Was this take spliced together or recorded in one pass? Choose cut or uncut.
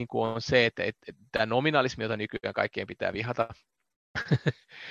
uncut